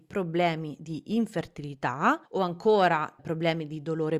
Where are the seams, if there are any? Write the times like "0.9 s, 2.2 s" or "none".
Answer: 2.3 s